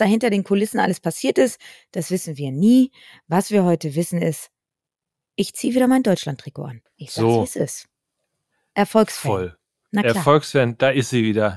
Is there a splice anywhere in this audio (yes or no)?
no